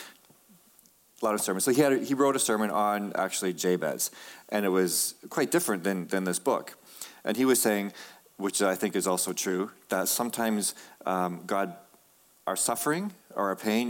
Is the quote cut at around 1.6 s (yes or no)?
no